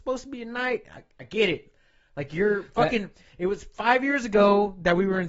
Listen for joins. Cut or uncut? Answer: uncut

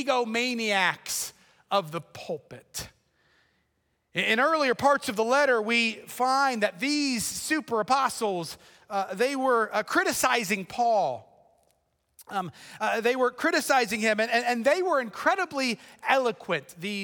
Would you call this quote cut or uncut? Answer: uncut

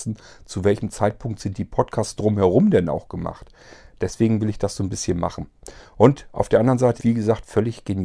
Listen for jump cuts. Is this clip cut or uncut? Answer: cut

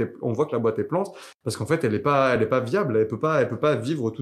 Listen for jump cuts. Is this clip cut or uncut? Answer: uncut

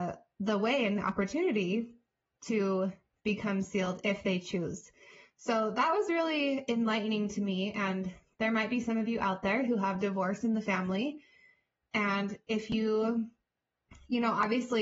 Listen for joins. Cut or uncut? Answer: uncut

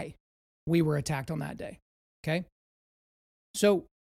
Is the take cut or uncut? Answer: uncut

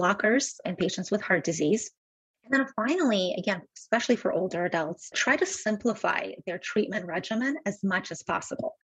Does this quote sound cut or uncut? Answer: uncut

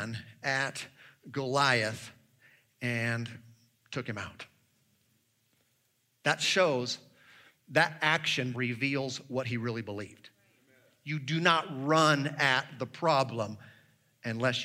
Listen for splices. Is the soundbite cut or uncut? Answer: cut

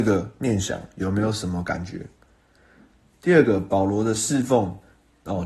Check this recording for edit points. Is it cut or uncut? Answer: uncut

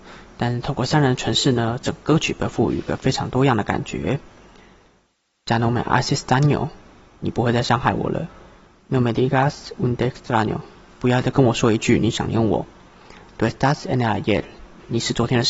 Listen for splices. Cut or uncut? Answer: uncut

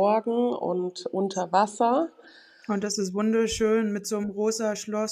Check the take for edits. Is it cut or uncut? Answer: uncut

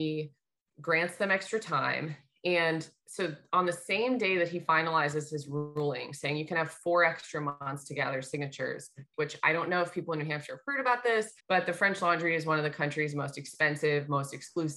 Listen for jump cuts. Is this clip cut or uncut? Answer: cut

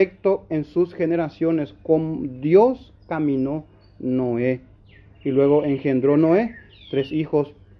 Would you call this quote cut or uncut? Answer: uncut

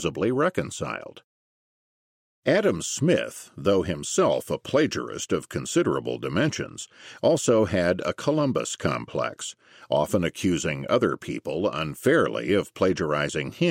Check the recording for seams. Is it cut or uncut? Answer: uncut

